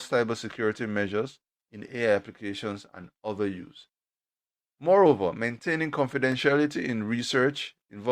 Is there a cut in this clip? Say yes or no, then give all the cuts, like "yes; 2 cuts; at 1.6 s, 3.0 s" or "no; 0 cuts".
no; 0 cuts